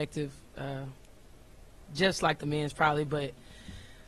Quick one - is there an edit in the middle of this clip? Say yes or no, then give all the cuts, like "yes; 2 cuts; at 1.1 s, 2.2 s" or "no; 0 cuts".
no; 0 cuts